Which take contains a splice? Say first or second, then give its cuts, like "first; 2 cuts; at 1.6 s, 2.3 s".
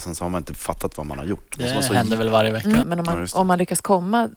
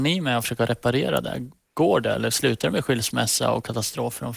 first; 1 cut; at 2.8 s